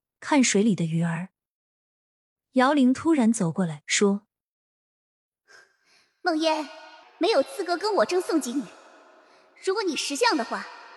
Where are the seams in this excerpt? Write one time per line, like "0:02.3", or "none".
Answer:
0:07.0